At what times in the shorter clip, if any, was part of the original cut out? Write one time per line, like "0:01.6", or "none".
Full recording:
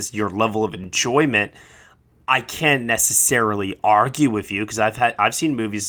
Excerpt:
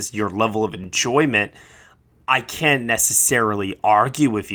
none